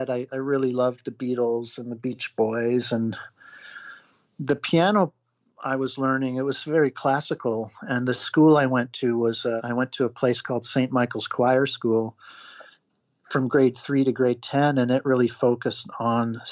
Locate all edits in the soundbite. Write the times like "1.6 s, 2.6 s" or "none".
9.6 s